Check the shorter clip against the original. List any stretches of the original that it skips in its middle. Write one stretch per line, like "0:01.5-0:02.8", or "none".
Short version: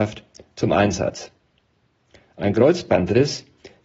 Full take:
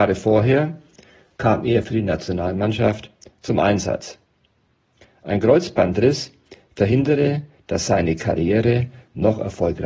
none